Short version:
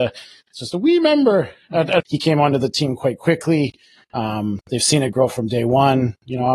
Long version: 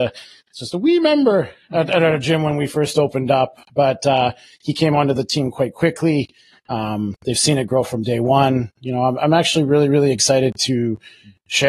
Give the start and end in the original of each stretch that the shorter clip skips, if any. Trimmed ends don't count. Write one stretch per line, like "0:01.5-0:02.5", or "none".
0:02.0-0:04.5